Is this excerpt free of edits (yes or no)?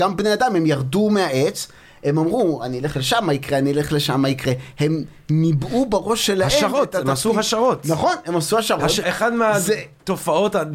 no